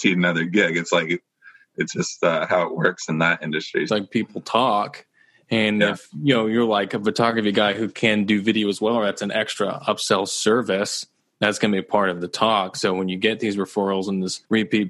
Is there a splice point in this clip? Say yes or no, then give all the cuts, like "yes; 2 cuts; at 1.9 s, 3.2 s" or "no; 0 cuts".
yes; 1 cut; at 3.9 s